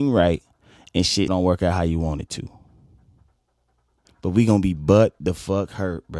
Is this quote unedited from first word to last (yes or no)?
no